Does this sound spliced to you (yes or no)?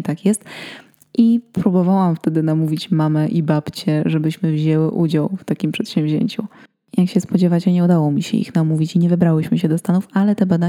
no